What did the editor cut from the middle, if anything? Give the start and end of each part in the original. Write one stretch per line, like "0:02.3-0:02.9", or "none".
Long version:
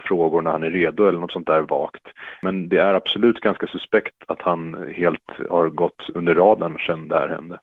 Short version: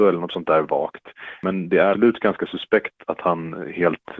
0:02.9-0:03.1